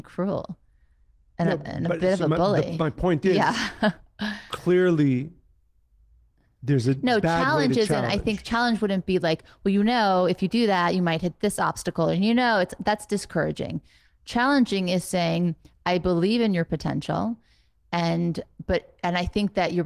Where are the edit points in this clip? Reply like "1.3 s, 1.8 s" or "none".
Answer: none